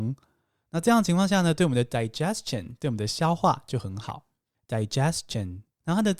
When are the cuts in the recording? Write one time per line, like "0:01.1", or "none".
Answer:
0:04.5